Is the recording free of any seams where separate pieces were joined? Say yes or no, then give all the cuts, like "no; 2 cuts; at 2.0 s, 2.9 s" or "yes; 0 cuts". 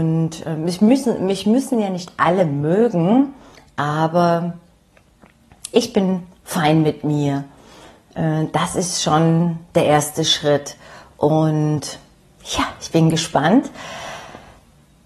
yes; 0 cuts